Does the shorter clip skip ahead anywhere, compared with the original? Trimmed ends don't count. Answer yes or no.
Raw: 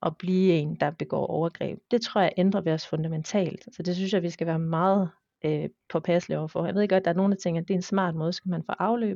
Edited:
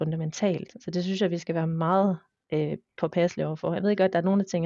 no